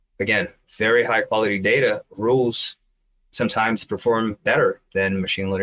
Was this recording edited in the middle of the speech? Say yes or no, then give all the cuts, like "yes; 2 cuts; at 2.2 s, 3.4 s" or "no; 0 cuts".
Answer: no; 0 cuts